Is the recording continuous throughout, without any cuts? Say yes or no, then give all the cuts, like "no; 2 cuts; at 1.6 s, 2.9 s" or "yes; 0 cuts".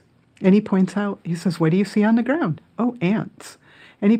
yes; 0 cuts